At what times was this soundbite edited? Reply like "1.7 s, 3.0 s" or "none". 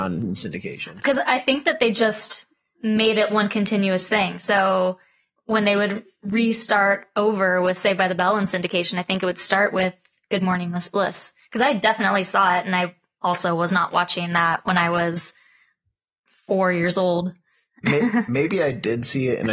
none

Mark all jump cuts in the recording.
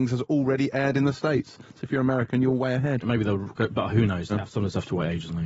3.0 s, 4.3 s

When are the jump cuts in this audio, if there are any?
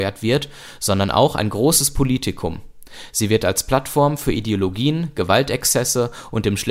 none

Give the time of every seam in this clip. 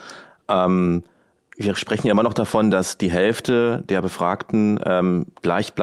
none

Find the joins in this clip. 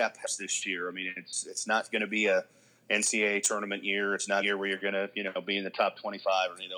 none

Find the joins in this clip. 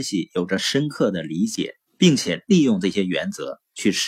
1.9 s

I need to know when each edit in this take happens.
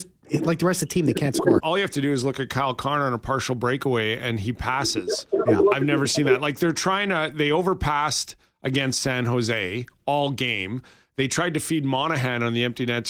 1.6 s

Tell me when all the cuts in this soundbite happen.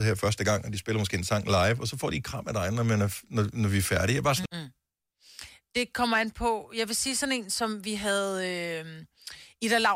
4.5 s

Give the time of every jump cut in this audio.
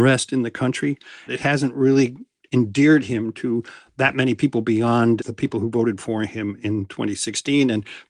1.3 s, 5.2 s

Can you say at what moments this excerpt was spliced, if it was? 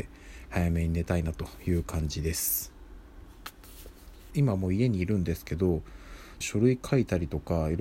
4.3 s, 6.4 s

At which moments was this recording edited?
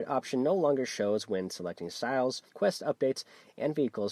2.5 s

